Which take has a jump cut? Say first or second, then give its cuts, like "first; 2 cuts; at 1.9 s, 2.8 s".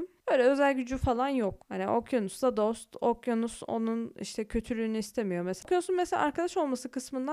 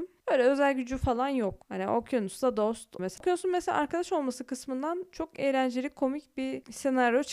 second; 1 cut; at 3.0 s